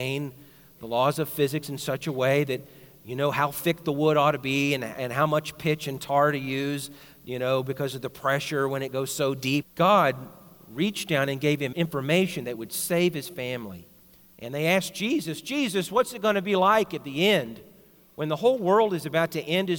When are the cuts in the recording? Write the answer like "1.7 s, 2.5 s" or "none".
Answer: 9.6 s